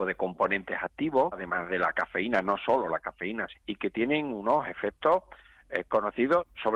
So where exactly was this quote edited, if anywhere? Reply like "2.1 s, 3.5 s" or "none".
1.3 s, 3.5 s